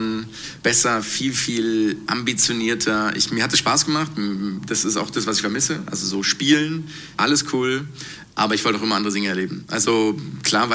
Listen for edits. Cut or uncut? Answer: cut